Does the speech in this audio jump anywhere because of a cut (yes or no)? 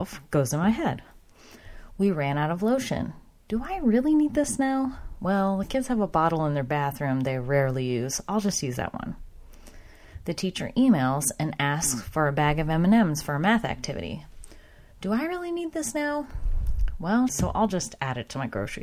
yes